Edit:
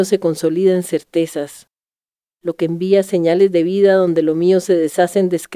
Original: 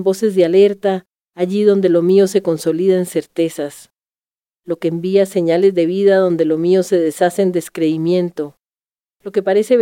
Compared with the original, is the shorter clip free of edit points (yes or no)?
yes